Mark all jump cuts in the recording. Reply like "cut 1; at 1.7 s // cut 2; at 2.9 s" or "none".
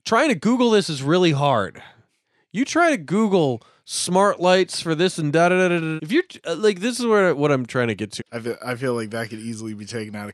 cut 1; at 6.0 s // cut 2; at 8.2 s